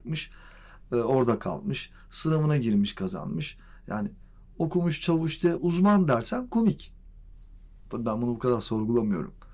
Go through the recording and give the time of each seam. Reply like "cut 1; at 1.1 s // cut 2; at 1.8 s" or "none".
cut 1; at 5.6 s